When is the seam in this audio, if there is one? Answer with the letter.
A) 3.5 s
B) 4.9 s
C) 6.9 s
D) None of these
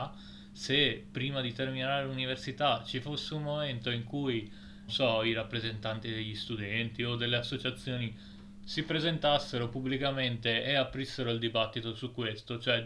B